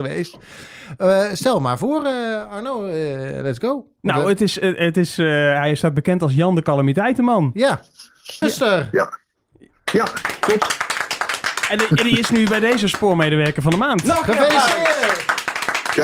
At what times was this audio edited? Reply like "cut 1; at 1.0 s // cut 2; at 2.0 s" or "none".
cut 1; at 8.4 s